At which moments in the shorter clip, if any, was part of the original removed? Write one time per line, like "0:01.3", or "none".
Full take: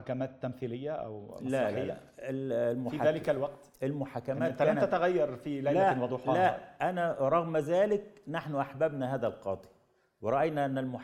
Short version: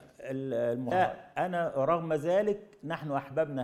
0:00.9